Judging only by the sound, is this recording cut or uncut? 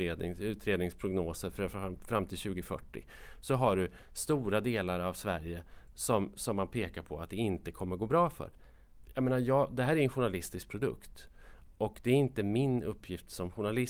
uncut